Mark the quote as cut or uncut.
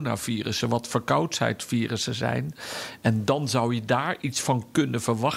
uncut